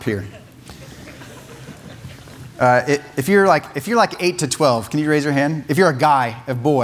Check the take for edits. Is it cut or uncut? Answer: uncut